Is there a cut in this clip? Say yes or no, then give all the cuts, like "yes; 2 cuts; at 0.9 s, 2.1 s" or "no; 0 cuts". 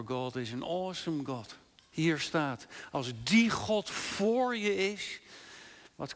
yes; 1 cut; at 1.8 s